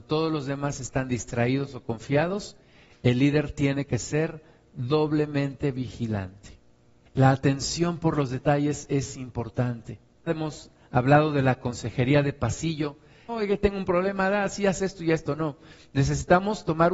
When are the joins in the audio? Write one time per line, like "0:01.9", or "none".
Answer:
0:07.1
0:10.3
0:13.3